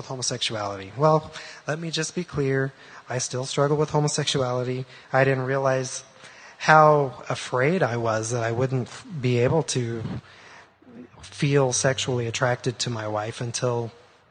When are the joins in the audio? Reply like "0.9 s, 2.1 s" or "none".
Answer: 5.0 s